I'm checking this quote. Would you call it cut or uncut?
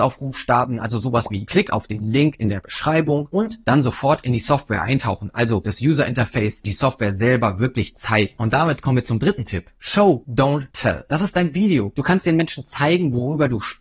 uncut